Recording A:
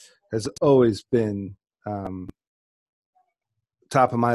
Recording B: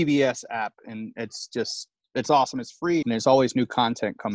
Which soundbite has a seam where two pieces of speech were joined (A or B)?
B